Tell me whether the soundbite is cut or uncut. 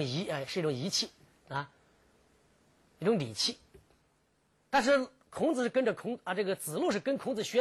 uncut